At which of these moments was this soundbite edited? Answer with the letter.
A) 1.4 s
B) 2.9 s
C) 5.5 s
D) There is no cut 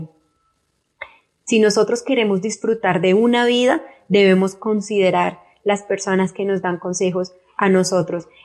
A